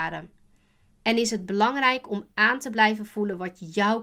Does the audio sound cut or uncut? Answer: cut